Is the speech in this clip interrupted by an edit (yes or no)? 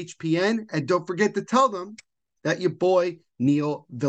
no